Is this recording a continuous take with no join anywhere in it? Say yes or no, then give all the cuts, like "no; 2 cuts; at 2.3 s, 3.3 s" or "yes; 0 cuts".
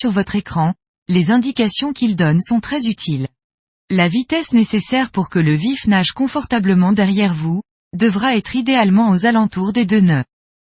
no; 2 cuts; at 3.8 s, 7.8 s